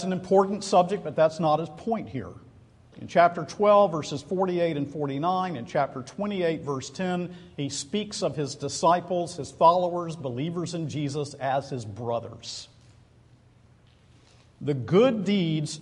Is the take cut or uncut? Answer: cut